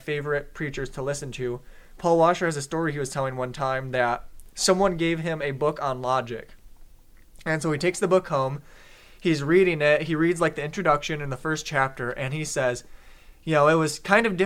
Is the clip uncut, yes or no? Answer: yes